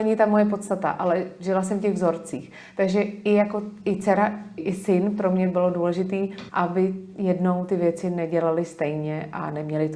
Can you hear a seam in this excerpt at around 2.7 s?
no; 2 cuts; at 4.6 s, 6.5 s

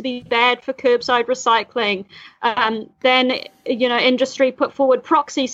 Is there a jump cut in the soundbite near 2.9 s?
no; 0 cuts

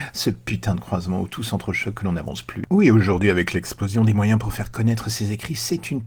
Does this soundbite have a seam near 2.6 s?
yes; 1 cut; at 2.6 s

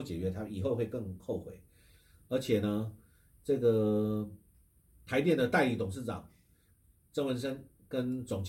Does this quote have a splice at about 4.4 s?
no; 0 cuts

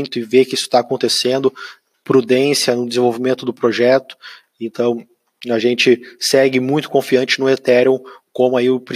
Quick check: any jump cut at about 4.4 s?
no; 0 cuts

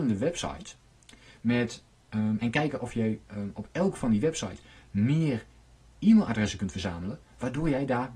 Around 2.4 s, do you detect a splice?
no; 0 cuts

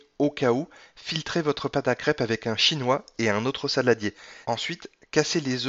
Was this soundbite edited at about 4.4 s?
yes; 1 cut; at 4.4 s

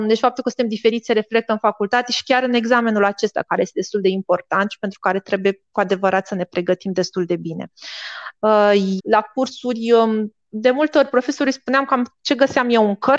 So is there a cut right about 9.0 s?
yes; 1 cut; at 9.0 s

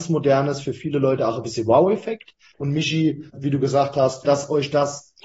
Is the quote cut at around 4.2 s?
yes; 2 cuts; at 2.5 s, 4.2 s

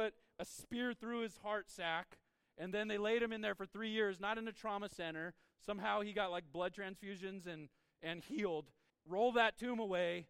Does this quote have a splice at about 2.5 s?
no; 1 cut; at 8.9 s

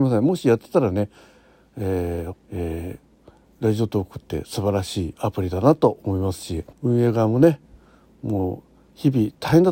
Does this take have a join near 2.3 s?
yes; 2 cuts; at 2.3 s, 6.7 s

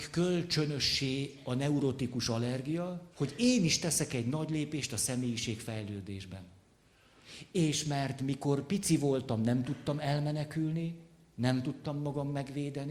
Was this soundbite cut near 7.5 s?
no; 1 cut; at 3.1 s

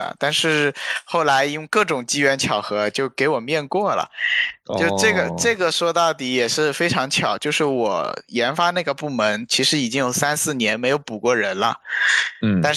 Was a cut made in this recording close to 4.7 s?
no; 0 cuts

